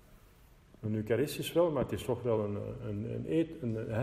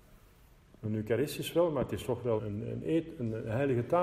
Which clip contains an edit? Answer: second; 1 cut; at 2.4 s

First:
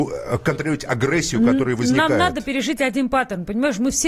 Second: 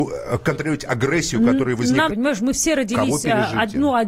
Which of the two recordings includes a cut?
second; 1 cut; at 2.1 s

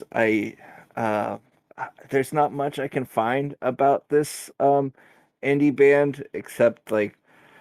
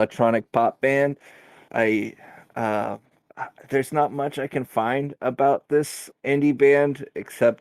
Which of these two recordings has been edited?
second; 2 cuts; at 1.7 s, 6.1 s

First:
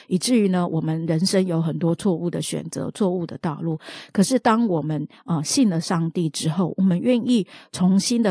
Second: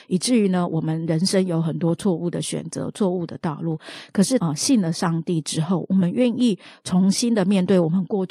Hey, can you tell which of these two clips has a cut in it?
second; 1 cut; at 4.4 s

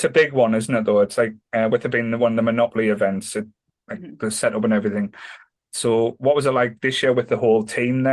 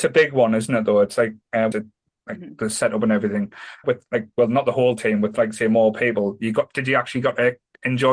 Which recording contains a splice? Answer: second; 2 cuts; at 1.7 s, 3.8 s

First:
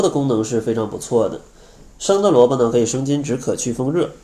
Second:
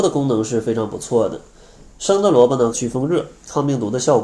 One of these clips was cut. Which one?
second; 1 cut; at 2.7 s

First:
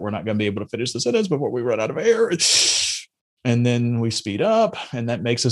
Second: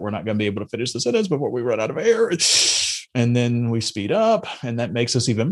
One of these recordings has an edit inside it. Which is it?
second; 1 cut; at 3.1 s

